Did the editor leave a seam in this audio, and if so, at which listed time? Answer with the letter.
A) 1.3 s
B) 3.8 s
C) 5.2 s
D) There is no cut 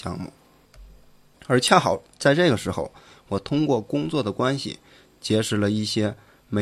A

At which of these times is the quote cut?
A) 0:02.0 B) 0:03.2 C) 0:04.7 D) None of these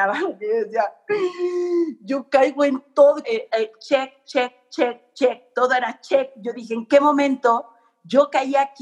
B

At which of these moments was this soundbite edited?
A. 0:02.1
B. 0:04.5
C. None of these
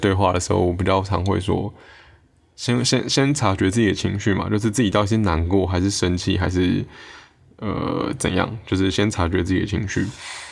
C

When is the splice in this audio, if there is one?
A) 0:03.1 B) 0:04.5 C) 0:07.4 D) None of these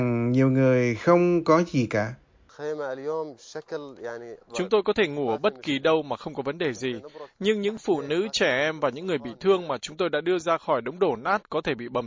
B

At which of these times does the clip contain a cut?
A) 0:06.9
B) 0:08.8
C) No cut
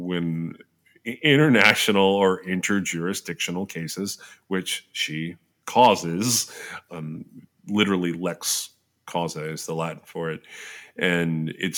A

